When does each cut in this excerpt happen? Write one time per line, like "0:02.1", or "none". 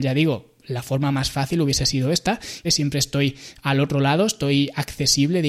0:02.6